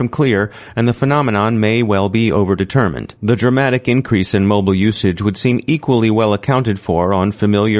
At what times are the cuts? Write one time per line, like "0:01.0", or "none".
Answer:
0:03.2